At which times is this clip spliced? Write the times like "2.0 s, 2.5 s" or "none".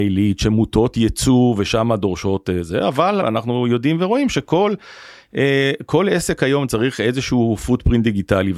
3.2 s